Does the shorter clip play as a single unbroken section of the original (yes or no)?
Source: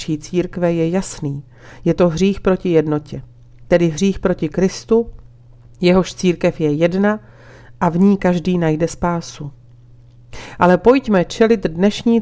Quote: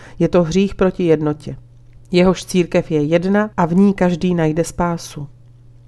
no